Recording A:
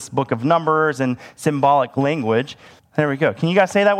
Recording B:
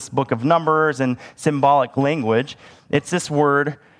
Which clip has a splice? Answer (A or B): A